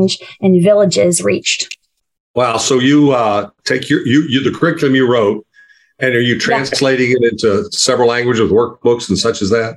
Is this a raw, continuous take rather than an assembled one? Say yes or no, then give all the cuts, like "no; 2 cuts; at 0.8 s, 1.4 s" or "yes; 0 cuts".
yes; 0 cuts